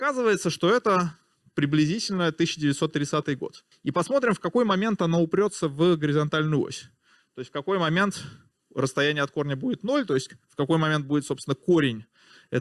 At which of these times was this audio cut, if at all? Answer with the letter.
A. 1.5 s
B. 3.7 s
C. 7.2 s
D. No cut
B